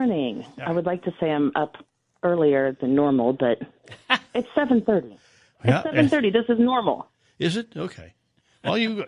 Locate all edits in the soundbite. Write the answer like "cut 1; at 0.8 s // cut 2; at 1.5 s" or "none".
none